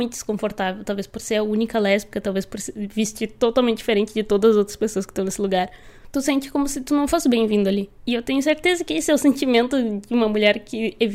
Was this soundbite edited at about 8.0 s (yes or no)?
yes